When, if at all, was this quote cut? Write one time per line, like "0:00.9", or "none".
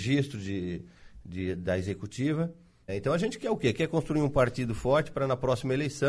0:02.9